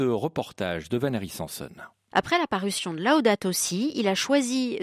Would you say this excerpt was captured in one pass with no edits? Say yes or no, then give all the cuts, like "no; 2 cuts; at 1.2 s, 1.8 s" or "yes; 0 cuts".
no; 1 cut; at 2.1 s